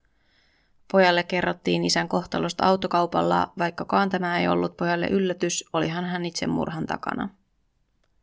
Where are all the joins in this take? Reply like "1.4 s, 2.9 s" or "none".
none